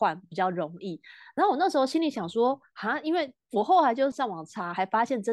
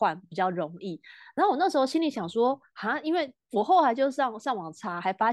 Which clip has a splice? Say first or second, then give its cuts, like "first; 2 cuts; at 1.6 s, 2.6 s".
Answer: first; 1 cut; at 4.1 s